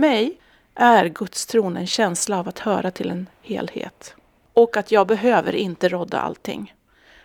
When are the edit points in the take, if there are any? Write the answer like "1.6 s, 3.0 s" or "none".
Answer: none